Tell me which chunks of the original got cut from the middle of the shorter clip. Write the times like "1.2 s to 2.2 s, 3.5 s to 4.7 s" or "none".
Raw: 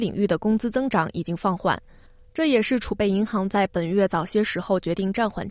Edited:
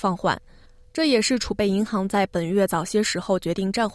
none